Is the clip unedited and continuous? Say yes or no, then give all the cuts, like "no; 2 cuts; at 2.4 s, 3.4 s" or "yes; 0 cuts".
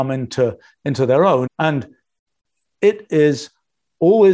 no; 1 cut; at 1.5 s